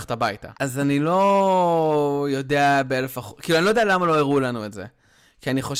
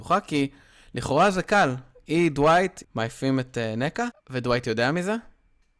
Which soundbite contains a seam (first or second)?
second